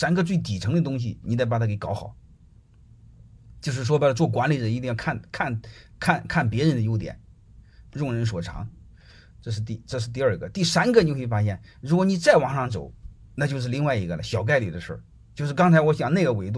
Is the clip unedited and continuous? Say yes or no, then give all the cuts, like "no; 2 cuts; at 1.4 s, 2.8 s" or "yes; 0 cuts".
yes; 0 cuts